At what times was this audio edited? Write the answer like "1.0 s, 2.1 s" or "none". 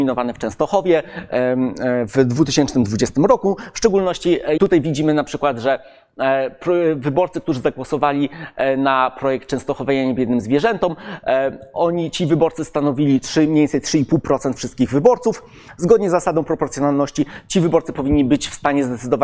4.6 s